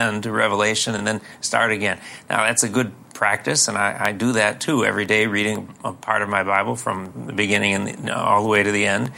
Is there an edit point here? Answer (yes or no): no